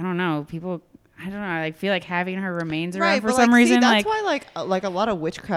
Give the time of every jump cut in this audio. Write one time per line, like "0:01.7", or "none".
none